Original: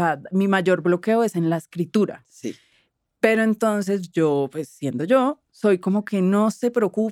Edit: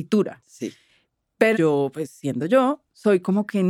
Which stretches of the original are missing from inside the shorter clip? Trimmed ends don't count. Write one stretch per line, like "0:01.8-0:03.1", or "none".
0:03.4-0:04.1